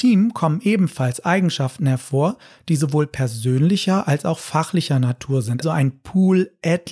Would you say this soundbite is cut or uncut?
cut